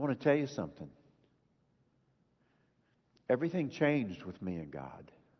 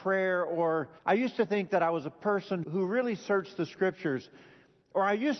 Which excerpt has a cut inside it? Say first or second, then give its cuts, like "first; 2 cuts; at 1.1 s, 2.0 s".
second; 2 cuts; at 1.0 s, 2.6 s